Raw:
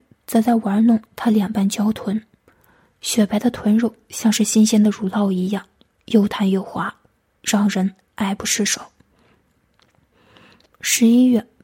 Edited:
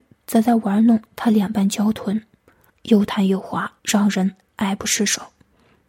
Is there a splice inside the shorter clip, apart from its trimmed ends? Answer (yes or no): yes